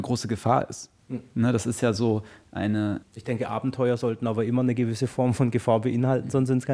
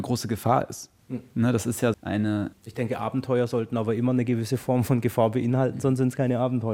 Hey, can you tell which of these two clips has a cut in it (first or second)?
second